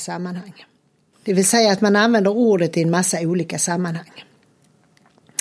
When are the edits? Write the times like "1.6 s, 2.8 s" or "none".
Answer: 1.1 s